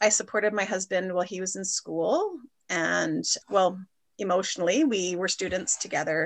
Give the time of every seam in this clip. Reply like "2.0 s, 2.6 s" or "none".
none